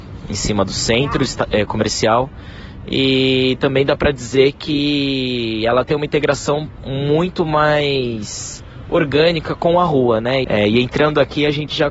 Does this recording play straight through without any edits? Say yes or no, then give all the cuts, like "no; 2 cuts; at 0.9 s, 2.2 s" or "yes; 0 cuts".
no; 1 cut; at 10.4 s